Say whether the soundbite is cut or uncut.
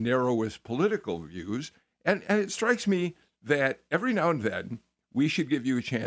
uncut